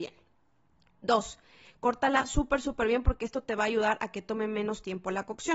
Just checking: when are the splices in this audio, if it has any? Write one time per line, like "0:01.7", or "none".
0:01.7